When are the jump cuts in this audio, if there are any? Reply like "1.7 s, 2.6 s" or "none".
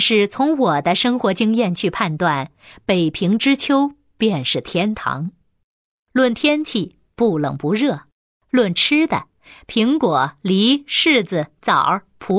none